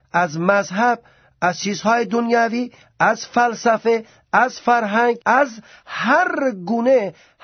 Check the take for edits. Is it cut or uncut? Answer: cut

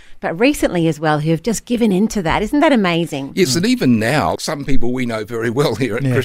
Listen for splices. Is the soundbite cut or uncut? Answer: cut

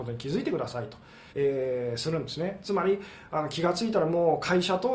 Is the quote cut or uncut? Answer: cut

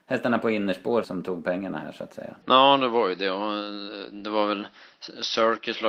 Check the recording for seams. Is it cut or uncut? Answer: cut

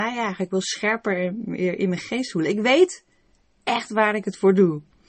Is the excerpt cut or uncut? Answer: uncut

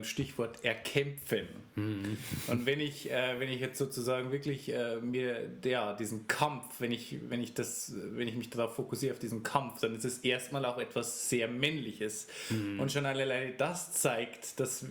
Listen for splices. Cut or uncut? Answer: uncut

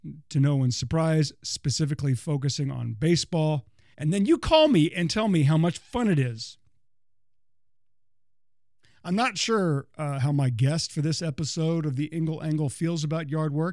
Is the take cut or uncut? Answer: cut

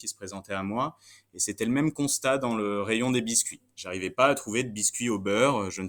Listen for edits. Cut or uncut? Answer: uncut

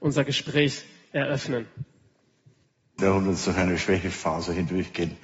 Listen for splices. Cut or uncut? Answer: cut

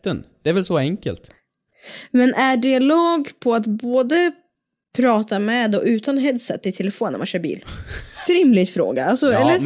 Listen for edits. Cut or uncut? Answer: cut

